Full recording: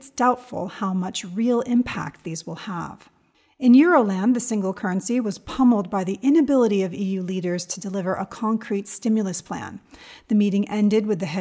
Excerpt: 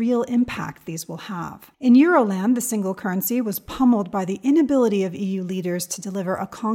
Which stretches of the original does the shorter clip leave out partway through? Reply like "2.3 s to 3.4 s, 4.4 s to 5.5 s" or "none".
3.1 s to 3.5 s